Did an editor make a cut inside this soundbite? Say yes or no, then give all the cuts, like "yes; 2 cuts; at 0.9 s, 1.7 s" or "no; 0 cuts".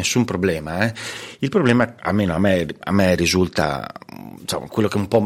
yes; 1 cut; at 2.0 s